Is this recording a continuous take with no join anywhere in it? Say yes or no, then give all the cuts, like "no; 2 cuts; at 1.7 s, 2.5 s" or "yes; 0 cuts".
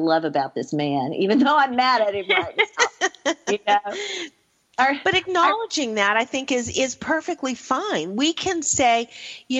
yes; 0 cuts